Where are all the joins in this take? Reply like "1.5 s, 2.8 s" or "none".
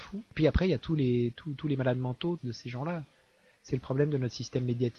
2.4 s